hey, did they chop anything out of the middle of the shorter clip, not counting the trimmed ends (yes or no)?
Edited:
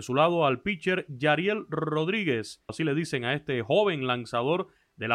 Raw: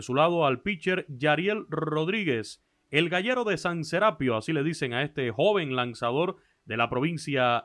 yes